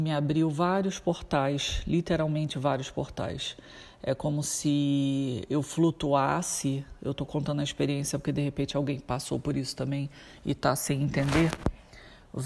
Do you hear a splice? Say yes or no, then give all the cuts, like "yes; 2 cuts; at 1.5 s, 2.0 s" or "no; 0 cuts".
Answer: no; 0 cuts